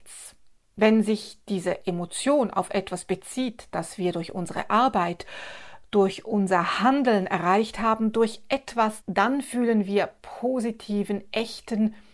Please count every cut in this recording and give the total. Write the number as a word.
one